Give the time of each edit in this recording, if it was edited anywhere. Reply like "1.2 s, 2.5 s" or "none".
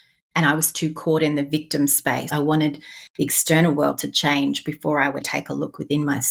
2.3 s, 5.2 s